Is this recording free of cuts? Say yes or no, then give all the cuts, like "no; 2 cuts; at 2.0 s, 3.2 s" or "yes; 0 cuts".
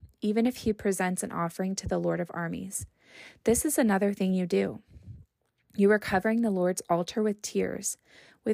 yes; 0 cuts